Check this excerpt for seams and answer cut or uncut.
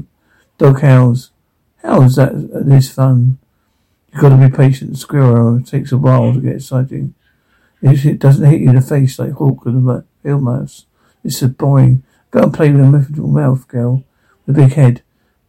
uncut